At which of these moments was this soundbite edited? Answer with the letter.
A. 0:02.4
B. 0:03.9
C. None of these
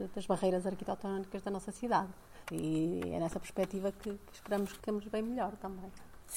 A